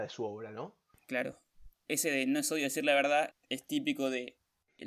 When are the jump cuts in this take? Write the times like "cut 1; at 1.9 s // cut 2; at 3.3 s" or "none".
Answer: cut 1; at 0.9 s // cut 2; at 3.3 s